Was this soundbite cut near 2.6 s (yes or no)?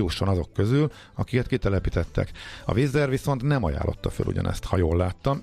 no